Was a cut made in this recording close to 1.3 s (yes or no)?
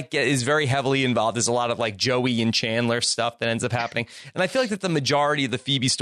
no